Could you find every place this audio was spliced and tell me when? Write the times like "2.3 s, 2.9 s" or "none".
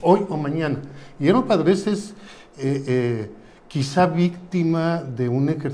none